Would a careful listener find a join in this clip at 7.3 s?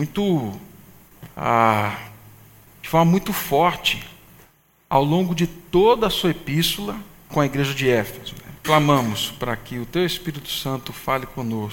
yes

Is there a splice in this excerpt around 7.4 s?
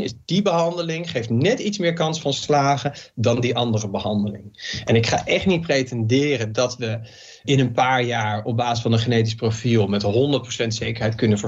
yes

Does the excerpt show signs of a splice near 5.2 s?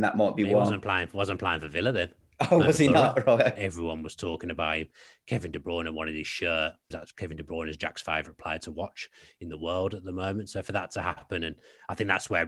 no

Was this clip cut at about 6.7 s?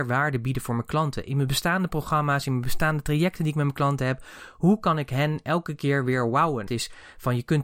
yes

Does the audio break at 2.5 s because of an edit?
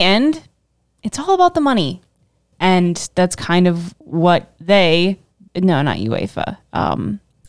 yes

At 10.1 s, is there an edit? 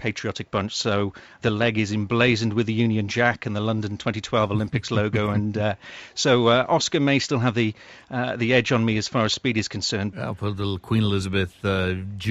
yes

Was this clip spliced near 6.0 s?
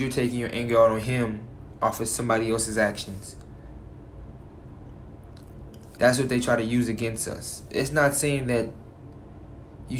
yes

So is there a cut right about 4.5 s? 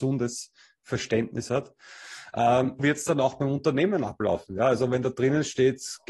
no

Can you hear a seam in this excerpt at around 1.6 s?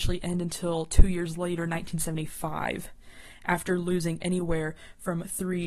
no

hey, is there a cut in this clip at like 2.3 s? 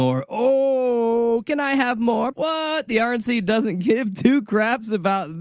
yes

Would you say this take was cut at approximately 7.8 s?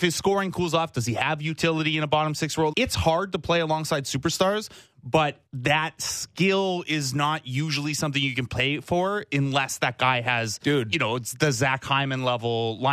no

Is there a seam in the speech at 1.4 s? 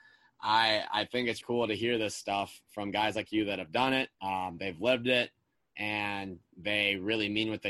yes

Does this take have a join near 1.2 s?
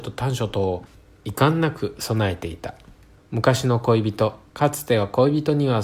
no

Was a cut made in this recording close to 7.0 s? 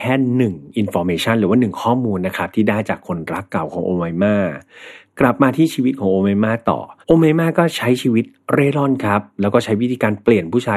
yes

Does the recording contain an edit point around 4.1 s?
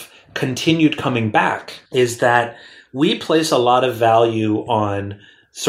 no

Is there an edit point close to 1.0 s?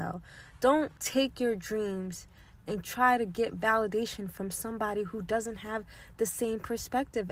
yes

